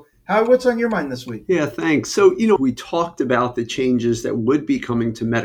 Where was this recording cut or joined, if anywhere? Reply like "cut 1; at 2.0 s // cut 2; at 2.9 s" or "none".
cut 1; at 2.6 s